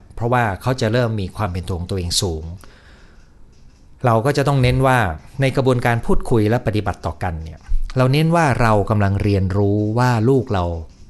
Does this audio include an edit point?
no; 0 cuts

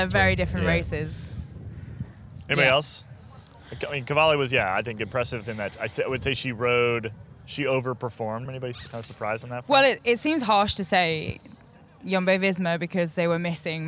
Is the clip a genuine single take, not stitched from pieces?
no; 1 cut; at 8.5 s

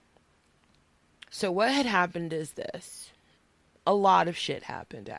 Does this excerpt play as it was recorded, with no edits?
no; 1 cut; at 1.3 s

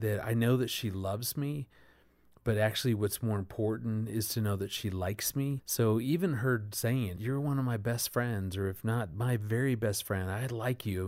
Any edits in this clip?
yes; 2 cuts; at 5.6 s, 7.2 s

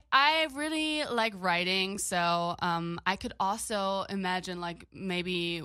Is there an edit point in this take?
no; 0 cuts

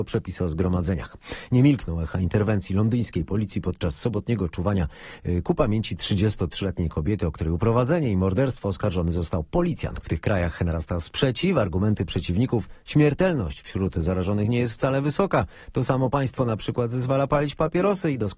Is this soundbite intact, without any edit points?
no; 1 cut; at 10.0 s

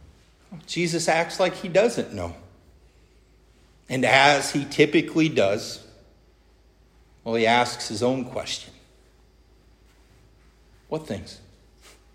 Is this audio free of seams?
yes; 0 cuts

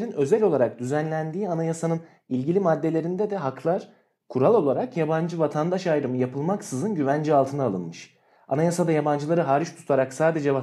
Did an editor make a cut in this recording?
no; 0 cuts

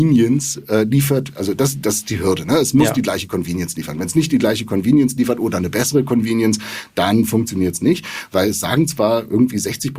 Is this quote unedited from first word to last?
yes; 0 cuts

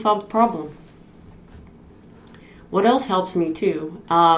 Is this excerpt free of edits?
yes; 0 cuts

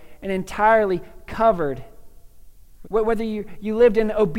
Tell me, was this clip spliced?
yes; 1 cut; at 2.8 s

